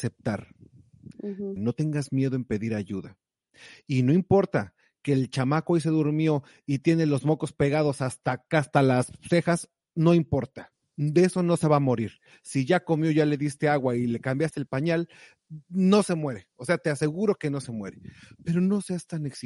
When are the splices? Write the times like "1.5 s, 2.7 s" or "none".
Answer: 1.6 s